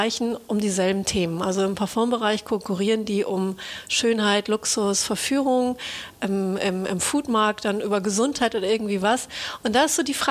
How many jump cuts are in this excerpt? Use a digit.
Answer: 0